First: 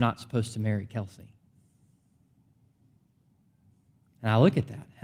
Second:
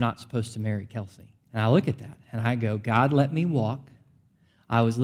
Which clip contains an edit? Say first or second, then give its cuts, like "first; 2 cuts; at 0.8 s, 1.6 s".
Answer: second; 1 cut; at 1.4 s